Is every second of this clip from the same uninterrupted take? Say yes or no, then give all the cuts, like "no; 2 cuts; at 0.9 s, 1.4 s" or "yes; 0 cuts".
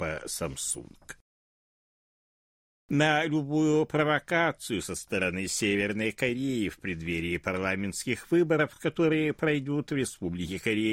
yes; 0 cuts